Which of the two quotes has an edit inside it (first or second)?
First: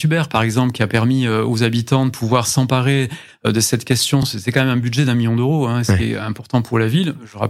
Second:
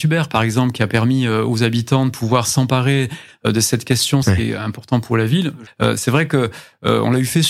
second